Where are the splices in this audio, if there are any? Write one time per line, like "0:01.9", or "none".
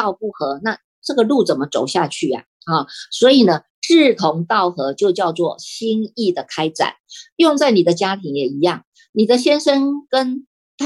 none